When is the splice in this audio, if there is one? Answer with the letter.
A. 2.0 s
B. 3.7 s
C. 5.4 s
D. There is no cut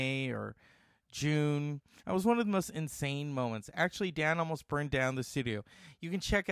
A